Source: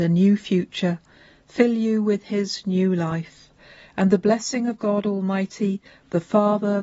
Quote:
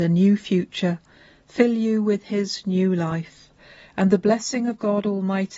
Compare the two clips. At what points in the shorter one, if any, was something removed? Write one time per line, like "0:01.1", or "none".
none